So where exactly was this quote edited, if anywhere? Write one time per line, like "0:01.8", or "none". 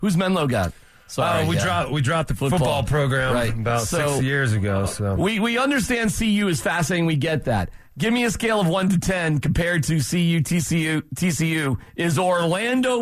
none